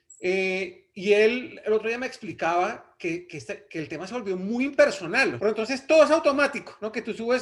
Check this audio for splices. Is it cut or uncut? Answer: cut